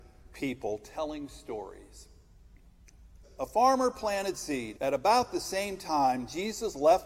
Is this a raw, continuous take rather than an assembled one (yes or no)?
no